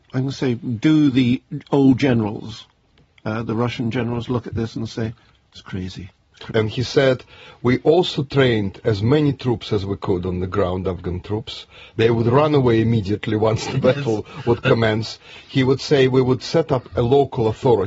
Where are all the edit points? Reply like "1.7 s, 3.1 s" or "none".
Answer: 6.5 s